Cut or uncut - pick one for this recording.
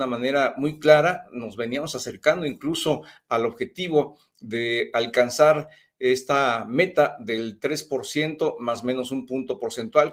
uncut